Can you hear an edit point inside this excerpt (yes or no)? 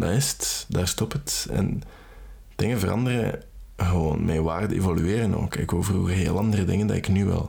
no